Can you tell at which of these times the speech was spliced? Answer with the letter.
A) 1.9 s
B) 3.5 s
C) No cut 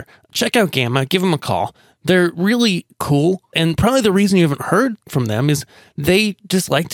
B